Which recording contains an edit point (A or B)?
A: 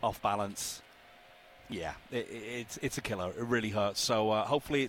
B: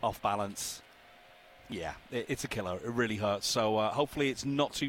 B